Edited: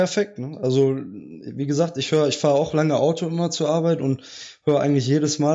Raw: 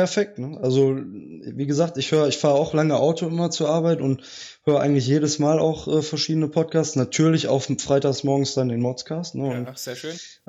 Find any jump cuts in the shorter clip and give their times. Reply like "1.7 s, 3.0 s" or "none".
none